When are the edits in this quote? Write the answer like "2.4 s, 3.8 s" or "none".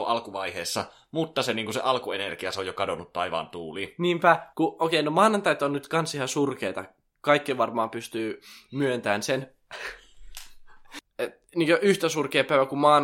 4.5 s, 11.0 s